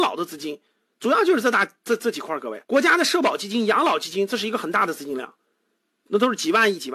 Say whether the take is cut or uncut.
cut